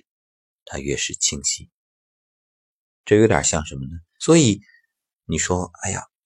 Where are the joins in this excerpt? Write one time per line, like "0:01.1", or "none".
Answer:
0:04.2